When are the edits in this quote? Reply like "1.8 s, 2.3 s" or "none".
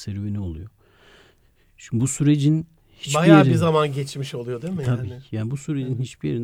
none